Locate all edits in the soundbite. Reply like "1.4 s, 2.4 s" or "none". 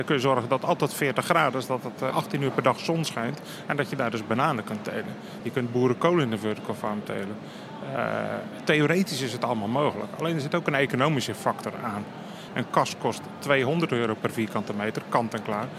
2.1 s, 5.4 s, 12.5 s